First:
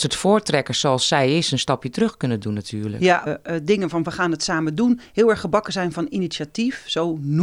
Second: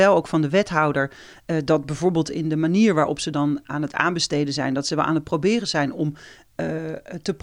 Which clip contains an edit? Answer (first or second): first